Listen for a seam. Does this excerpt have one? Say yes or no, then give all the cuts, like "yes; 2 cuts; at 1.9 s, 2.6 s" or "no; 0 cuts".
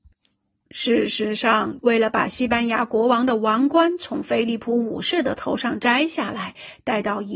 yes; 1 cut; at 1.8 s